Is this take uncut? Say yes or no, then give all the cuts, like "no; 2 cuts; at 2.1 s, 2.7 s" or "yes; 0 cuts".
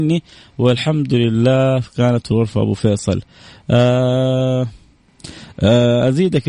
yes; 0 cuts